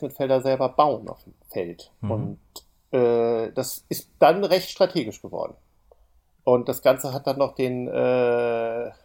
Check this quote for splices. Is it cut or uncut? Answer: uncut